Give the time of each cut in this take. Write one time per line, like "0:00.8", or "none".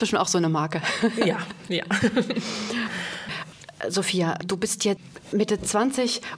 none

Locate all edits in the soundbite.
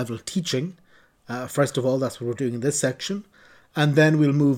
none

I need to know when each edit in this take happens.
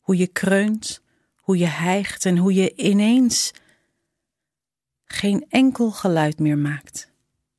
none

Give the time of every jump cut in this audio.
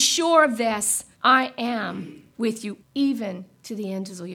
0:01.1
0:02.8

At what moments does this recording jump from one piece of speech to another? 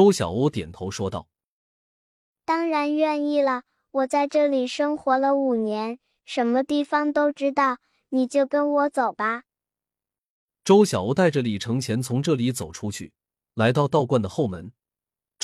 none

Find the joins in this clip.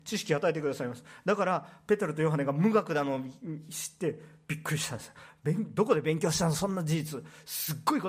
none

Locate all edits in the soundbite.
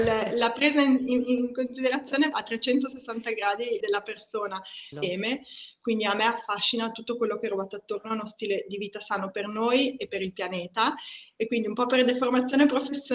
0:02.3
0:03.8
0:04.9

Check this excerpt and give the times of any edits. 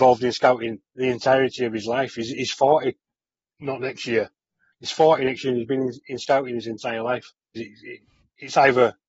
0:04.7
0:07.6

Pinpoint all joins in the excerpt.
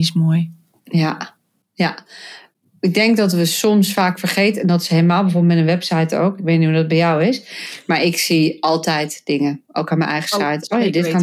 none

